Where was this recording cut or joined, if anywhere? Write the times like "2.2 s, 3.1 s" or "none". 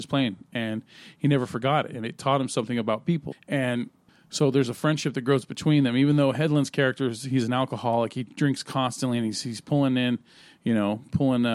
3.3 s